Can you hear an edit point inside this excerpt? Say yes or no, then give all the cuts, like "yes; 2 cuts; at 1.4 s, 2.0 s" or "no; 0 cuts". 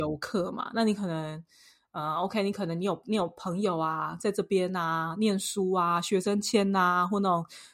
no; 0 cuts